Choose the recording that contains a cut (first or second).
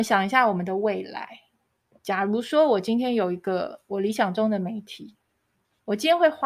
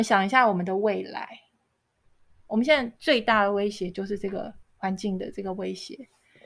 first